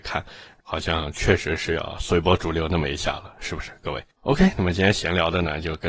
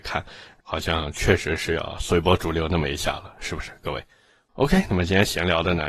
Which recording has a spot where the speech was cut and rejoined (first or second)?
first